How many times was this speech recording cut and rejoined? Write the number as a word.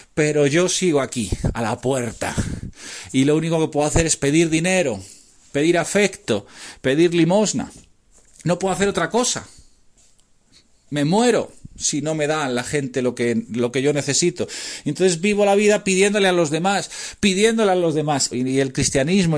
one